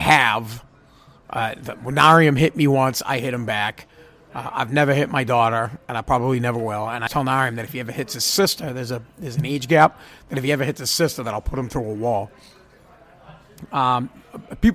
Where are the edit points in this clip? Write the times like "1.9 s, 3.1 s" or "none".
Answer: 7.1 s